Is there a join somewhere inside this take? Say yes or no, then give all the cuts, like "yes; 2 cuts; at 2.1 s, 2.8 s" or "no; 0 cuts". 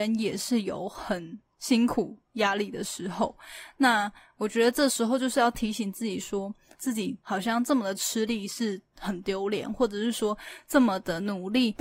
yes; 1 cut; at 6.7 s